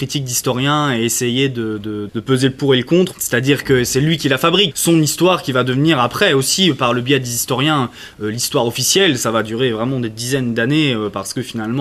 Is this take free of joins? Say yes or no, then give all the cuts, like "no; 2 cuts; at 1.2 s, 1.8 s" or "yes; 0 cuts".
no; 3 cuts; at 2.1 s, 3.1 s, 4.7 s